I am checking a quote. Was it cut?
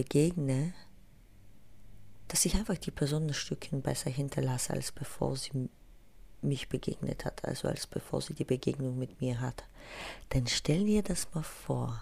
no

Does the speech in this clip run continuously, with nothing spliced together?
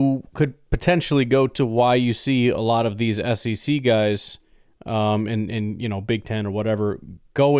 yes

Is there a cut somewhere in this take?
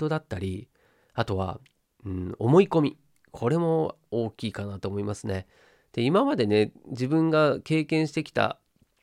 no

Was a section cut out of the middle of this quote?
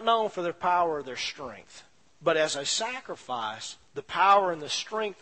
yes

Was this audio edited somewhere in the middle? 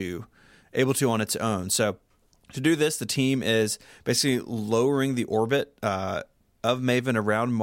no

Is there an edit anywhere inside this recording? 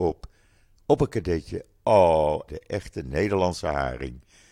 yes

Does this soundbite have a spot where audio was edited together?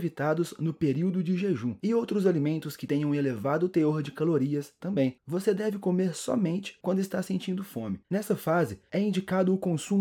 no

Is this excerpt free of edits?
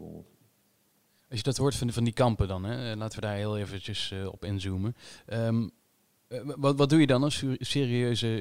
yes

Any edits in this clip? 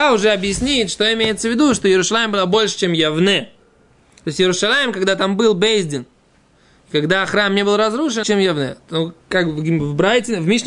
yes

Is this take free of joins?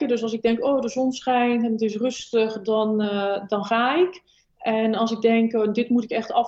yes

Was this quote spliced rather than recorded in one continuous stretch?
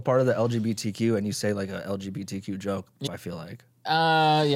yes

